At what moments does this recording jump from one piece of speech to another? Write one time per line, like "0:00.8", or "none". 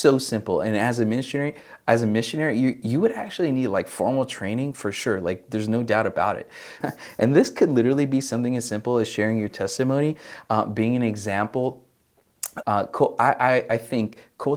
0:06.8
0:12.6